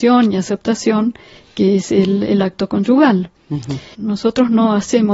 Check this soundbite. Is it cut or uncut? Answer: cut